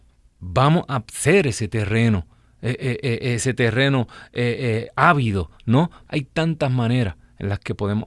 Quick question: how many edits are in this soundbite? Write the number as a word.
one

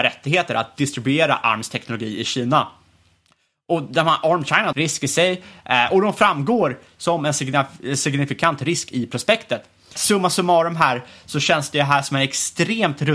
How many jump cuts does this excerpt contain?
two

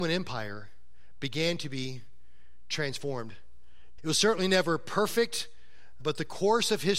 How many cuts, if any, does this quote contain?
two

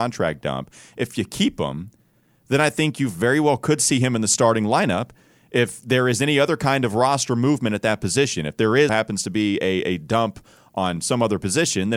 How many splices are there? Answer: one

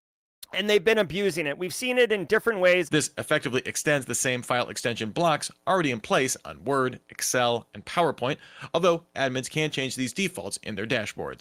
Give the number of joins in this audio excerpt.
two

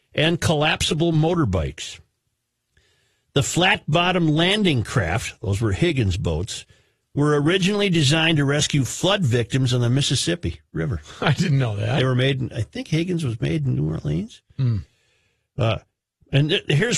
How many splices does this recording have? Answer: zero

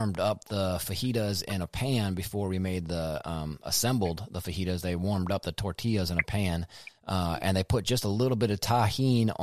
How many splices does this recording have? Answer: zero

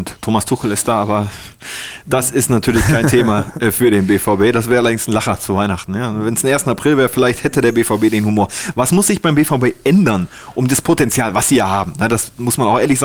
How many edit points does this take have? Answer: zero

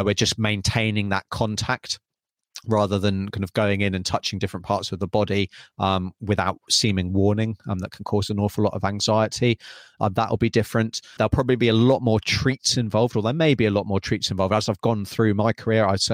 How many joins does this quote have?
one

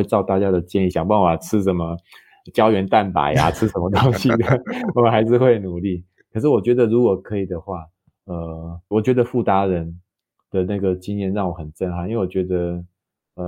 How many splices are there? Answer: two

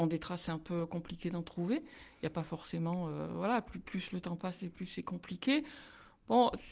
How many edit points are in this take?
zero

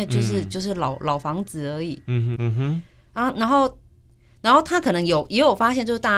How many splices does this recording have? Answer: one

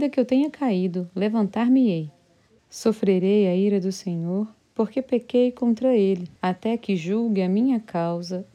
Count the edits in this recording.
two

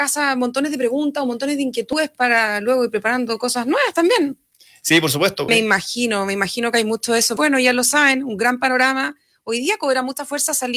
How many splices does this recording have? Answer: two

